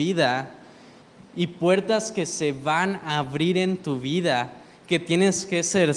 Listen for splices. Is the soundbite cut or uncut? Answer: uncut